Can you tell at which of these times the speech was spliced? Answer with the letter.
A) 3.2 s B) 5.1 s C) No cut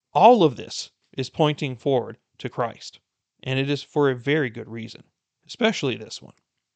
A